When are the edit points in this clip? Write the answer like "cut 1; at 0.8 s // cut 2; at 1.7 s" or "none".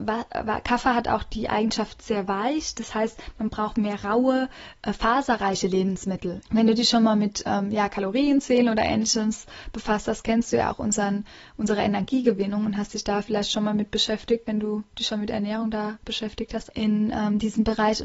cut 1; at 6.4 s // cut 2; at 16.7 s